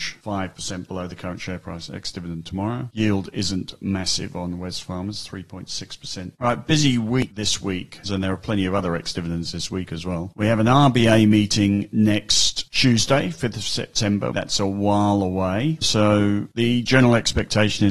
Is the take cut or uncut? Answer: cut